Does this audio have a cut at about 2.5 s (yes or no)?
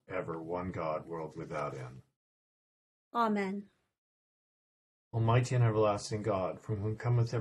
no